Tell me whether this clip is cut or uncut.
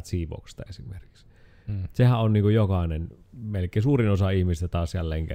uncut